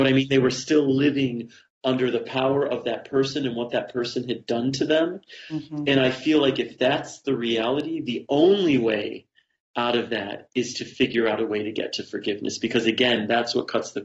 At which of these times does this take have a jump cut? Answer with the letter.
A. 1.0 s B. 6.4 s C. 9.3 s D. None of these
D